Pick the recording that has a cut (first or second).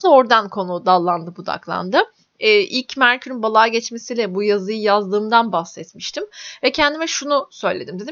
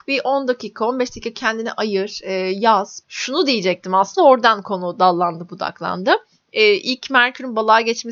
second